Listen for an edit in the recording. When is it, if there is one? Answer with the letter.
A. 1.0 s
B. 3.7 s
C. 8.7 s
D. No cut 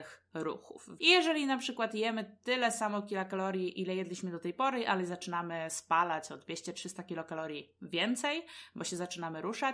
A